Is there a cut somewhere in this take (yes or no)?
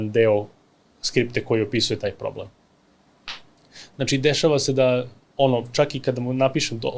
yes